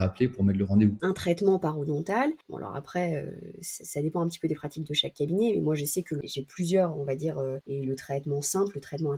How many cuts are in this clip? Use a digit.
2